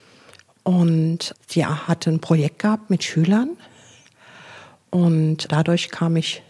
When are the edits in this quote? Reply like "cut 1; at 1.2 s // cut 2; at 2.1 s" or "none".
cut 1; at 1.3 s // cut 2; at 5.5 s